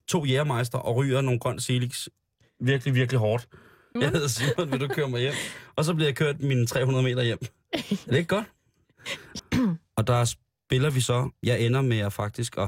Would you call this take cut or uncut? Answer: cut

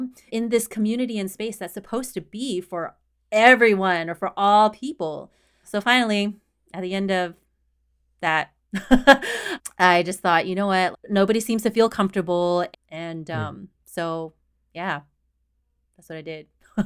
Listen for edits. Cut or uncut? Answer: cut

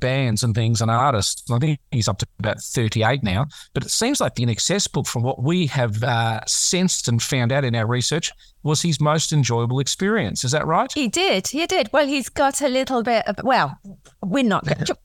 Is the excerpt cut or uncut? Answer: uncut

